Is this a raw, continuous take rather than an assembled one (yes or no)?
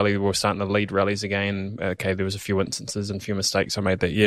yes